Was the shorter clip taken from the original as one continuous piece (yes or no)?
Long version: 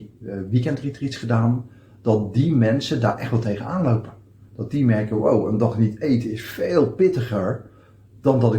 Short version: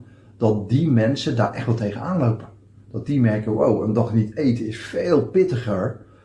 yes